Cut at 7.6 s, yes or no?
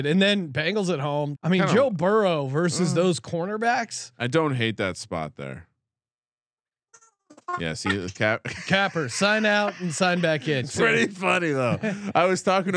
no